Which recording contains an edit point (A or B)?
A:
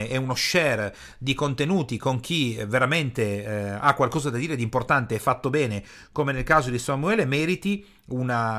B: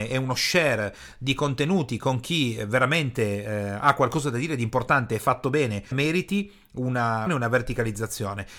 B